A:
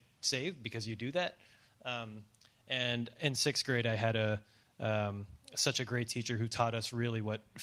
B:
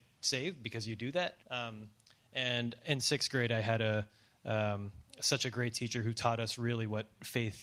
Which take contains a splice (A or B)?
B